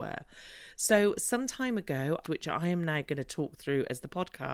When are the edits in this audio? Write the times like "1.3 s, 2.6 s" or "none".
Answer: 2.2 s